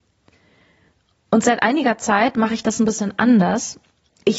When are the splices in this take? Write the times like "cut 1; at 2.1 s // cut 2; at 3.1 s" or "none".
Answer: none